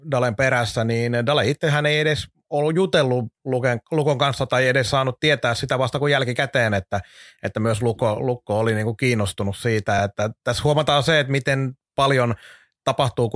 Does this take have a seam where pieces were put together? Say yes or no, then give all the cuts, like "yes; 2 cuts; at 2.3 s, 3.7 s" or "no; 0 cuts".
no; 0 cuts